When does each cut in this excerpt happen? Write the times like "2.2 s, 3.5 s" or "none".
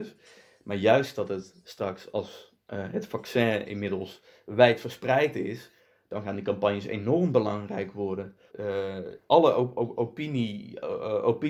8.5 s